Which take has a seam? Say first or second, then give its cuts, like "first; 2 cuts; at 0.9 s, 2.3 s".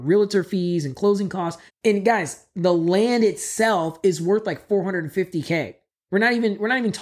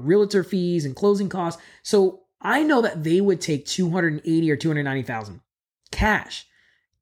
first; 1 cut; at 1.7 s